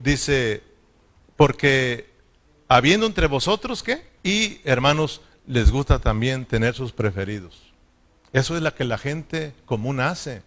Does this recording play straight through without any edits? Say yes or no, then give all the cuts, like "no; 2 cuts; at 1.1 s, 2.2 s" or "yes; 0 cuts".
no; 1 cut; at 4.2 s